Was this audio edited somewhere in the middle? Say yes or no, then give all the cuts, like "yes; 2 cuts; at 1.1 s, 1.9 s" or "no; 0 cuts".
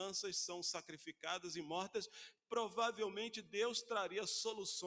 no; 0 cuts